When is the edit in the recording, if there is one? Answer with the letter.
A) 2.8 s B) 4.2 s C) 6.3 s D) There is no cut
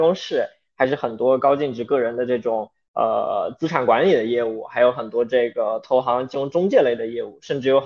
D